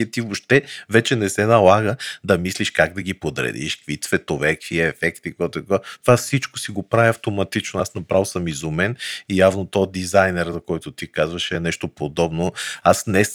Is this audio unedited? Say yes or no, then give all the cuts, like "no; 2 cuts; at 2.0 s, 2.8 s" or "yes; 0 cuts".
yes; 0 cuts